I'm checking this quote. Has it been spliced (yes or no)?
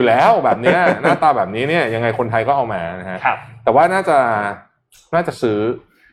no